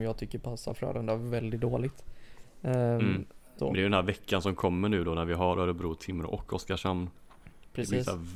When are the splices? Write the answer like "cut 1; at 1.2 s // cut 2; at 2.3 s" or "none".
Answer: cut 1; at 3.6 s